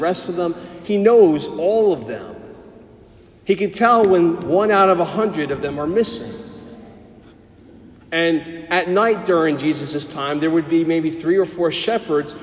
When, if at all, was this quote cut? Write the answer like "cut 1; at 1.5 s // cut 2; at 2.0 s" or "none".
none